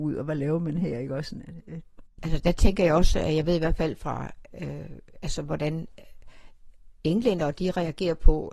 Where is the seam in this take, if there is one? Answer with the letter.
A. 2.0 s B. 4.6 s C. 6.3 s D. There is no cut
A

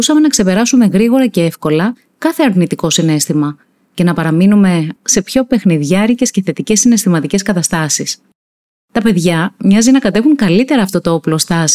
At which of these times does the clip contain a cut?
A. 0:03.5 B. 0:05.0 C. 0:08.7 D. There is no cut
B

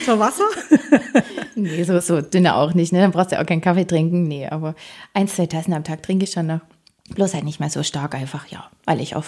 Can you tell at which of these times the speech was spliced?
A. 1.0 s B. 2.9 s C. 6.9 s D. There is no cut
D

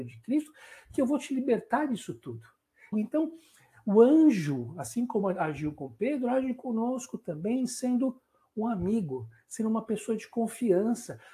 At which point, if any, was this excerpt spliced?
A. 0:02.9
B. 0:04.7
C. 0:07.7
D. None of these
A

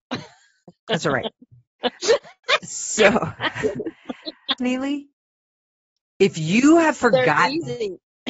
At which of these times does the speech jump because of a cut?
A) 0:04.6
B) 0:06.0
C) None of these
A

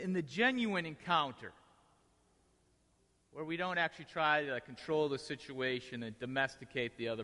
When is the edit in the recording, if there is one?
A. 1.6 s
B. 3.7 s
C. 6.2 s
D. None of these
D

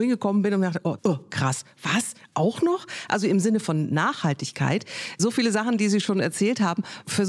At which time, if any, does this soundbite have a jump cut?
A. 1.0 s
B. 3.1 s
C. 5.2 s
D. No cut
A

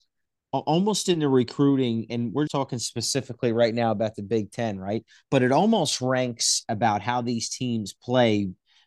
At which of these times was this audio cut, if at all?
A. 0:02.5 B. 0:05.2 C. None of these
A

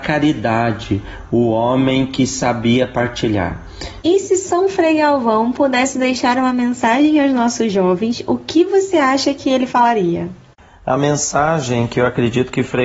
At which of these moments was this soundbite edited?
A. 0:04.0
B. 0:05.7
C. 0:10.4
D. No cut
A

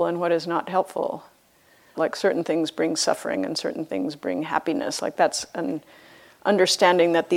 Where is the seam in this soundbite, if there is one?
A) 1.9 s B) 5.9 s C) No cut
A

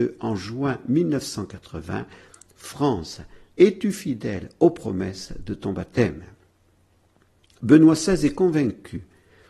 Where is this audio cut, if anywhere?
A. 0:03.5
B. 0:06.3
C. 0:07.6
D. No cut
A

